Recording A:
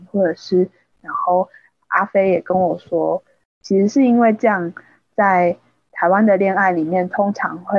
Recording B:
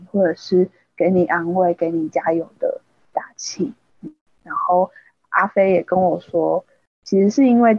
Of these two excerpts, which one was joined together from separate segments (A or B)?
A